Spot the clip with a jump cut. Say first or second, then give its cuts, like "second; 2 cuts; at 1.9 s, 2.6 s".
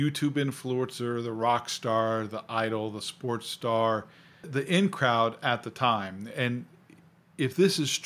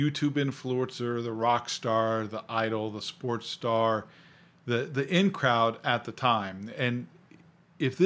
first; 1 cut; at 4.4 s